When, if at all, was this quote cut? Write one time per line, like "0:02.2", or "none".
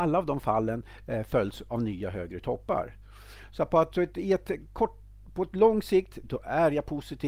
0:03.9